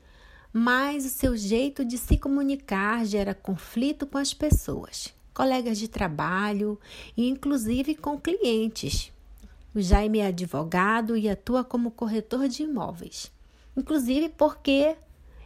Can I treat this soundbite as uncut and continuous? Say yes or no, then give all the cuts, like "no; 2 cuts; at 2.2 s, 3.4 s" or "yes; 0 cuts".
no; 2 cuts; at 9.7 s, 13.7 s